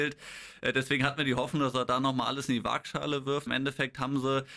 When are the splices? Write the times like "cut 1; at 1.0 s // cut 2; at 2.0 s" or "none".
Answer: cut 1; at 3.5 s